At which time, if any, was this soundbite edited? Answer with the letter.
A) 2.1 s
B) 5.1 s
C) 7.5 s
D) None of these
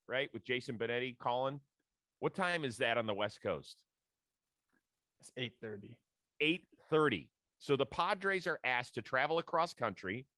A